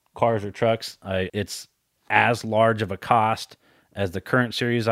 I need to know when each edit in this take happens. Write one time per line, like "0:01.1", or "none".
0:01.3